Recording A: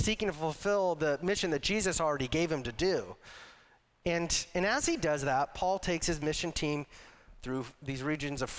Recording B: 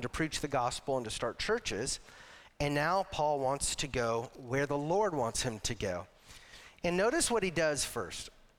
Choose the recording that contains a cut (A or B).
A